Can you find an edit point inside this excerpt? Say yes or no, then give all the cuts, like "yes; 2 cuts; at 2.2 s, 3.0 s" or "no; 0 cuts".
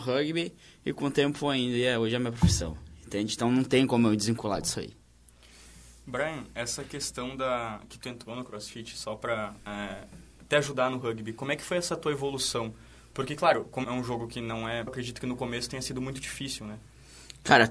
yes; 2 cuts; at 13.8 s, 14.9 s